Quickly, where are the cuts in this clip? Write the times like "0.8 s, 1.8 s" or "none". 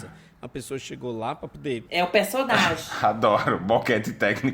1.8 s